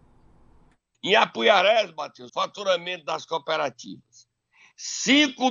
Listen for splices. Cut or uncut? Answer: cut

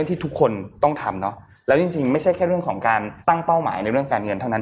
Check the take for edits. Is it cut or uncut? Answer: cut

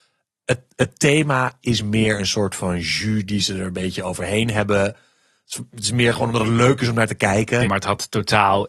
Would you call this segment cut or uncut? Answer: cut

